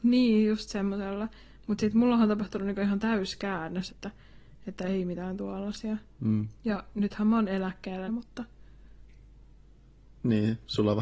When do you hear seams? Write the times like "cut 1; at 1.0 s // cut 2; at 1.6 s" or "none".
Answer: cut 1; at 3.9 s // cut 2; at 8.1 s